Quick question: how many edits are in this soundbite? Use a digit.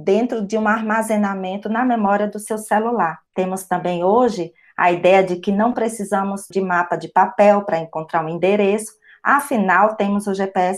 2